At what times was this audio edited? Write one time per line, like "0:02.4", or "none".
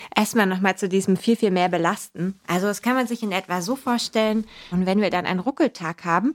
0:04.7